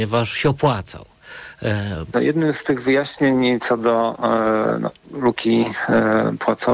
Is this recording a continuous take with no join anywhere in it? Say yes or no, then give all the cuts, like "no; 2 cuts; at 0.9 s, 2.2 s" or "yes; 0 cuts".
no; 1 cut; at 2.1 s